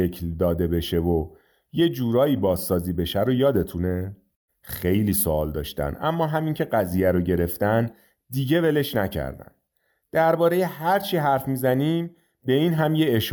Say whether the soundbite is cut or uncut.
cut